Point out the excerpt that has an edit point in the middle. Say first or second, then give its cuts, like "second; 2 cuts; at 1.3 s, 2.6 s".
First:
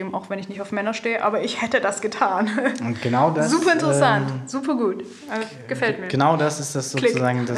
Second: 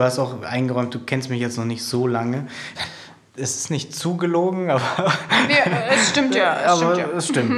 second; 1 cut; at 2.7 s